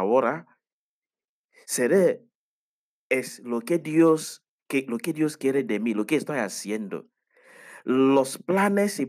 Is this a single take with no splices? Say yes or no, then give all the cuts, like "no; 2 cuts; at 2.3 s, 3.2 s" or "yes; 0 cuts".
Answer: yes; 0 cuts